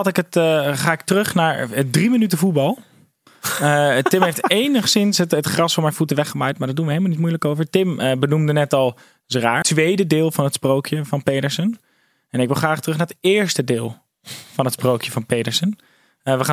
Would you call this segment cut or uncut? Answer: cut